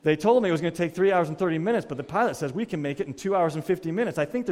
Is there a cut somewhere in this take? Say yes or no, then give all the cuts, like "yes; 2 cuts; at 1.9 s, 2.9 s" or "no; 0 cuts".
no; 0 cuts